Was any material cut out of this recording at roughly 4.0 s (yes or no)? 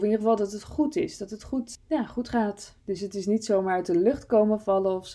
no